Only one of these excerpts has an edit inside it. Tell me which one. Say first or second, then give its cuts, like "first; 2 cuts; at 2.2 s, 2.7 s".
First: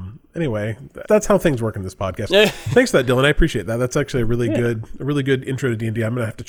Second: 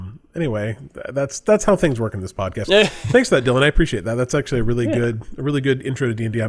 first; 1 cut; at 1.0 s